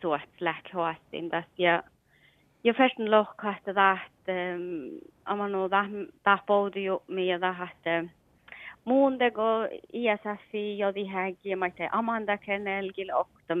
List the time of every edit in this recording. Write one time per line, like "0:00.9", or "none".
none